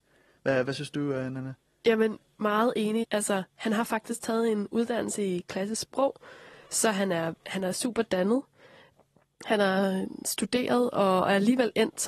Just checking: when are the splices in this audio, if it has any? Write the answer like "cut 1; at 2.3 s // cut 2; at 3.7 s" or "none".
cut 1; at 3.0 s